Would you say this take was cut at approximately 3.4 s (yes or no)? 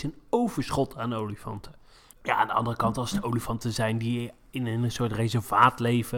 no